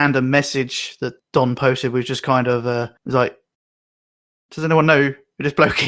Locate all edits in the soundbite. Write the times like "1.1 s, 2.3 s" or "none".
1.2 s, 3.0 s